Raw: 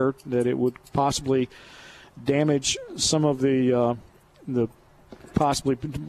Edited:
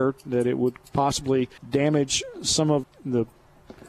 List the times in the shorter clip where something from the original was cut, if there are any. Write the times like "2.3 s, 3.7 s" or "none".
1.6 s, 2.8 s